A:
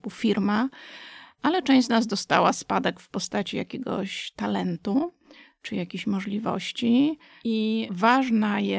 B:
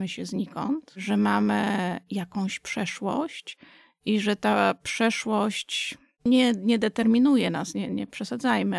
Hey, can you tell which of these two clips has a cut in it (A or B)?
B